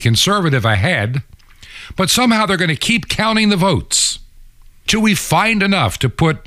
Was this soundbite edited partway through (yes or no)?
yes